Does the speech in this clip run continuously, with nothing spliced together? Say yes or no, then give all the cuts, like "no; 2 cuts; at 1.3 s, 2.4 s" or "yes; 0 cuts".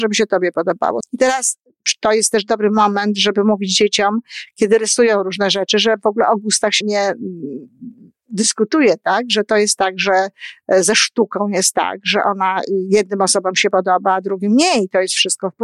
no; 2 cuts; at 1.0 s, 6.8 s